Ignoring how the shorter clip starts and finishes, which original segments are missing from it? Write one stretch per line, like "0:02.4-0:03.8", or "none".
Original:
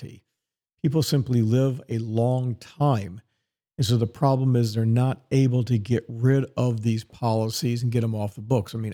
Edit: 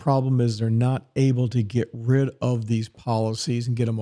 none